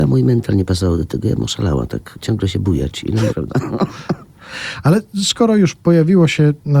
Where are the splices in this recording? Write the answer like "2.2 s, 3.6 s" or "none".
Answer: 3.3 s